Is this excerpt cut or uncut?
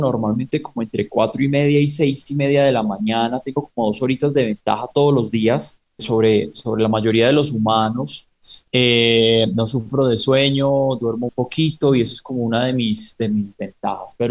cut